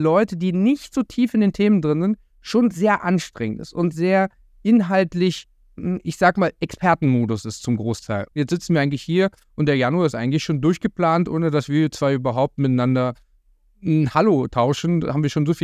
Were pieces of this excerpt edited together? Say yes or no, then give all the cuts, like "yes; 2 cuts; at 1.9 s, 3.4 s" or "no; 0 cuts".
yes; 1 cut; at 8.3 s